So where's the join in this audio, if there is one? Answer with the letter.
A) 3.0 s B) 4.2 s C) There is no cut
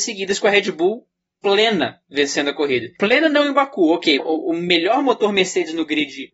B